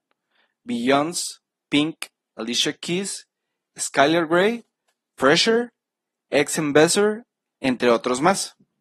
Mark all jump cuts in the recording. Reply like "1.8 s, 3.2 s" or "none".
7.5 s